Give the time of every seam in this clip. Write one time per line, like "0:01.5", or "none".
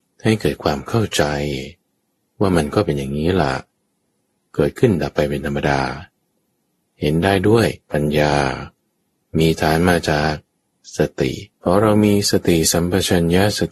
0:07.8
0:11.5